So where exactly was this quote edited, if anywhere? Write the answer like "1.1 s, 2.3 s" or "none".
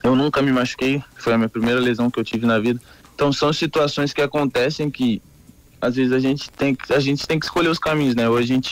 none